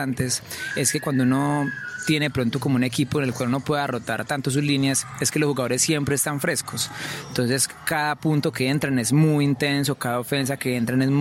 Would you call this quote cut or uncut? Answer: uncut